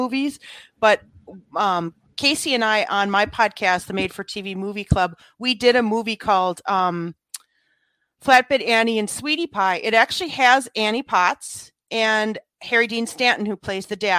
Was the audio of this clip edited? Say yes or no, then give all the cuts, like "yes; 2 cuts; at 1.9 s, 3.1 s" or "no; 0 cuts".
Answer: no; 0 cuts